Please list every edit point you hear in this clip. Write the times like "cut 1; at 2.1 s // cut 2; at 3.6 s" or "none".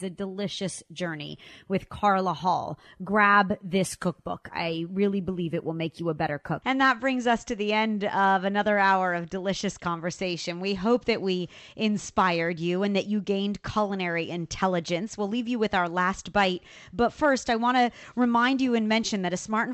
cut 1; at 6.6 s